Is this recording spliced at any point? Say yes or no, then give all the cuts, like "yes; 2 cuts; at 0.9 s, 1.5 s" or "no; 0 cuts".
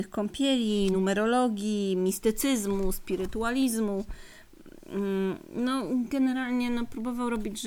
no; 0 cuts